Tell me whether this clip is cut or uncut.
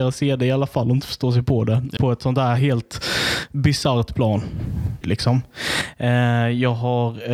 cut